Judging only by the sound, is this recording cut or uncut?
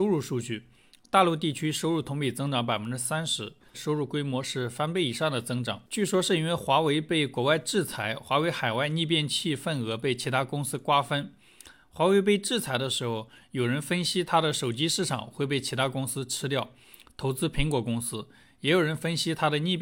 cut